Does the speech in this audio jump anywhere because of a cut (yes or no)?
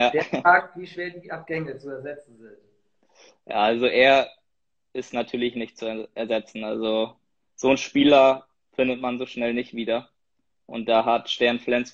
no